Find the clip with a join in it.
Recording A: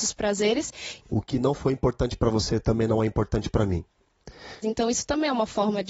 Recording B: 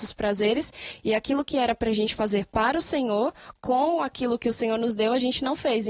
A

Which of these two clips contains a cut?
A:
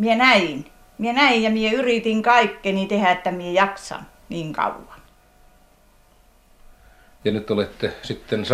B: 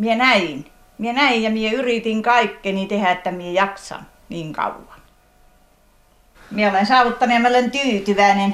B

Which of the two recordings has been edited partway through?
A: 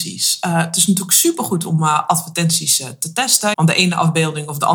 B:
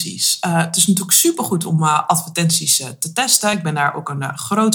A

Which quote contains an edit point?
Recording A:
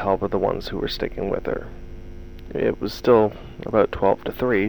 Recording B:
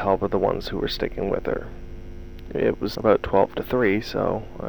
B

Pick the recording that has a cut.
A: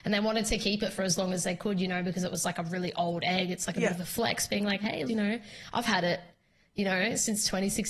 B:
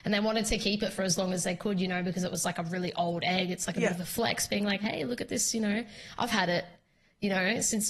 A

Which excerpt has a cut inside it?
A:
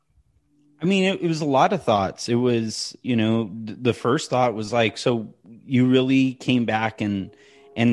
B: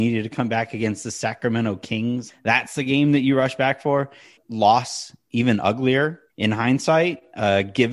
B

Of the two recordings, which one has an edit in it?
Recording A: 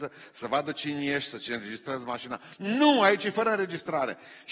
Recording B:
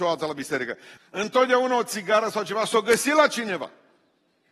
B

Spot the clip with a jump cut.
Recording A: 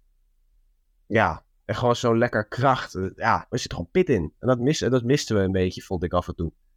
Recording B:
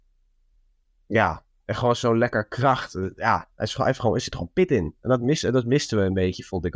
A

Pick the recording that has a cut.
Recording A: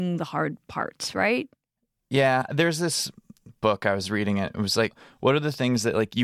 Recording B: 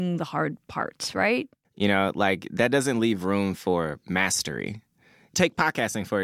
B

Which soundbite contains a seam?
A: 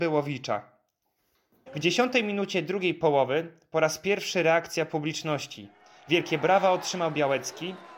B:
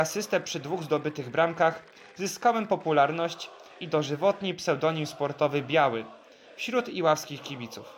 A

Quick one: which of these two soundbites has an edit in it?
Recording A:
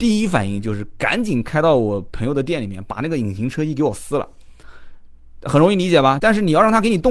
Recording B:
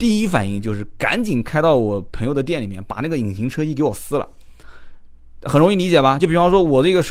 A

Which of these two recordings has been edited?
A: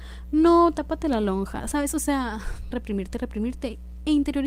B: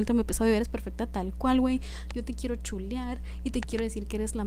A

